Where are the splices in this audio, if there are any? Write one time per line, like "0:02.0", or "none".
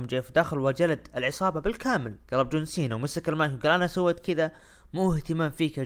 0:02.2

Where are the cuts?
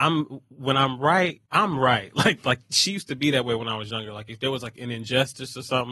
0:01.5

